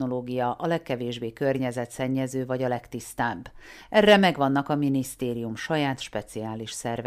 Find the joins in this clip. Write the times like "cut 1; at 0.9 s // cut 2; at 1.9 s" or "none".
none